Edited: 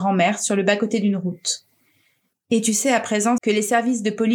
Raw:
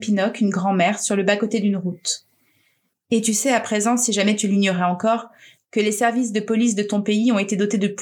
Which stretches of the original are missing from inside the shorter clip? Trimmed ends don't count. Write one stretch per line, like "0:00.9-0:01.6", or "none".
0:04.0-0:05.7